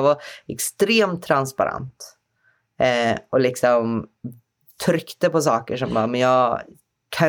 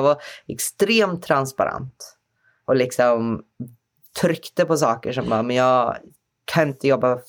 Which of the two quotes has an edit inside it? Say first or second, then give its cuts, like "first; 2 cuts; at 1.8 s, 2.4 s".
second; 1 cut; at 2.6 s